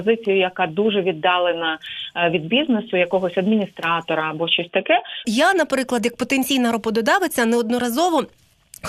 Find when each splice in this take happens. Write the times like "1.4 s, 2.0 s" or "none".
5.2 s